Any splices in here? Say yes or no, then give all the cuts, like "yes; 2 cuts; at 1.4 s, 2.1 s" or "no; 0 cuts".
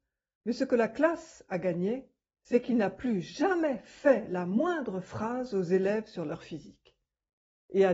no; 0 cuts